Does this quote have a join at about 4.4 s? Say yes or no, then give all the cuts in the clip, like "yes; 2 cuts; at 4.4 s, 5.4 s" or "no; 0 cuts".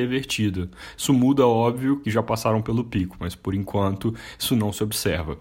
no; 1 cut; at 2.0 s